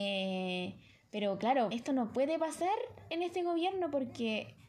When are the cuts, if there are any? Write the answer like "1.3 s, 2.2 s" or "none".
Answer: 1.7 s